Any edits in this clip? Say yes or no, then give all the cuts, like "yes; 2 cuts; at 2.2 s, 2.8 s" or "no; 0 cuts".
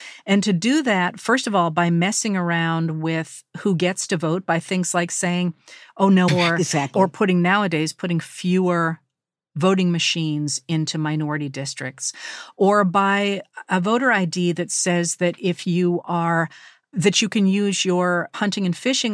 yes; 1 cut; at 6.3 s